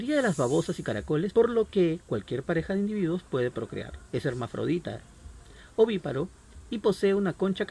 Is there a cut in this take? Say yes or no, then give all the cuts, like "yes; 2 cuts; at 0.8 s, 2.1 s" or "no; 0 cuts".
yes; 1 cut; at 1.3 s